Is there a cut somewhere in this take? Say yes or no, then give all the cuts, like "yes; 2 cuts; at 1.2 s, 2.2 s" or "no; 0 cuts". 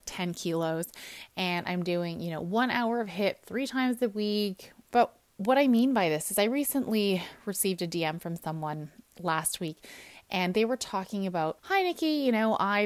yes; 2 cuts; at 4.9 s, 11.6 s